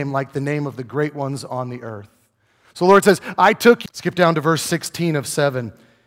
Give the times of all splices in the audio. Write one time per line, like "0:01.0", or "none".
0:03.9